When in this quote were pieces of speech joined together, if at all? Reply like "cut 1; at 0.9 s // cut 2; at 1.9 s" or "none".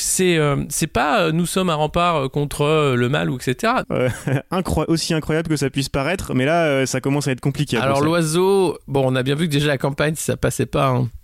cut 1; at 3.8 s